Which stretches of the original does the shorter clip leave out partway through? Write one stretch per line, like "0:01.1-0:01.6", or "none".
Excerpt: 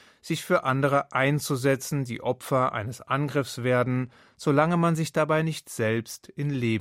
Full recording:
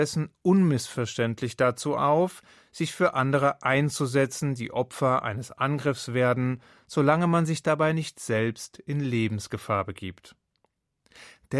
none